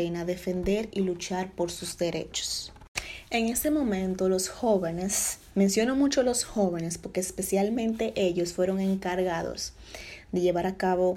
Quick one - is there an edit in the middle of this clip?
no; 0 cuts

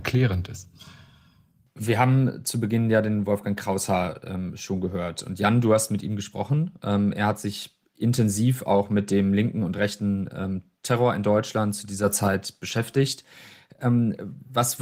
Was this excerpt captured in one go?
yes; 0 cuts

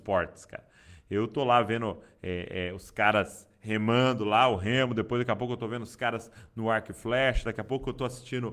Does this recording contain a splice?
no; 0 cuts

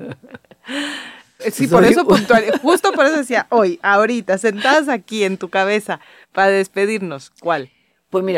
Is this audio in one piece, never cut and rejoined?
no; 1 cut; at 1.4 s

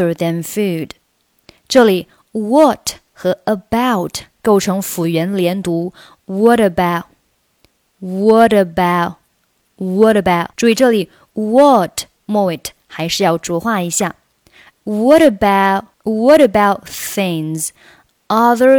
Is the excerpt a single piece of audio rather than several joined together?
no; 3 cuts; at 10.5 s, 14.7 s, 15.9 s

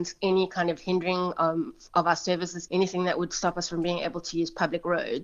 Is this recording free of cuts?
no; 1 cut; at 2.7 s

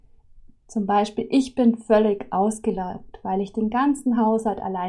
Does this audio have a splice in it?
no; 0 cuts

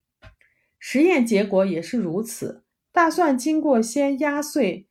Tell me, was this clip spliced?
yes; 1 cut; at 2.7 s

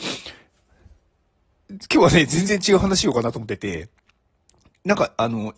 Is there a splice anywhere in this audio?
no; 0 cuts

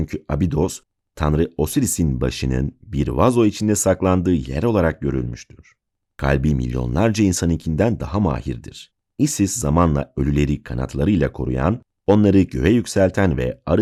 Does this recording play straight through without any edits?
no; 2 cuts; at 6.1 s, 9.0 s

